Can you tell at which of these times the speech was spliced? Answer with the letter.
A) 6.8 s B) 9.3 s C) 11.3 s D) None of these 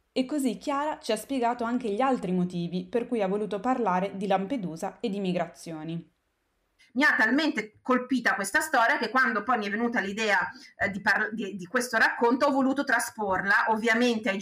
A